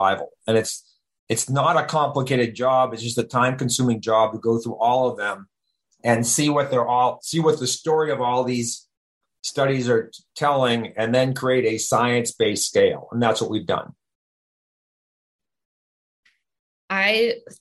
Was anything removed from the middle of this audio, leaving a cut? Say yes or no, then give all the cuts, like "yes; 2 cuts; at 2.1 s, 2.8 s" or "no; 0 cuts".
no; 0 cuts